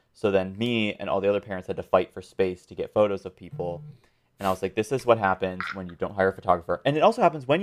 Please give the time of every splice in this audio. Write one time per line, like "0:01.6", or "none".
none